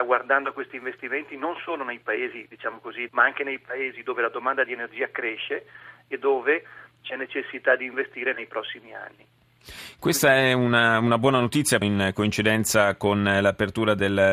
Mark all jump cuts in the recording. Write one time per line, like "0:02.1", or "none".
0:03.1
0:11.8